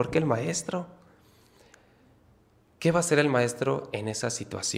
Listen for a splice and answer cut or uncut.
uncut